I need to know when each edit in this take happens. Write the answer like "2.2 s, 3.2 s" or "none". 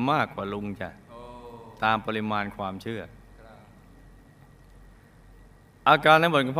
none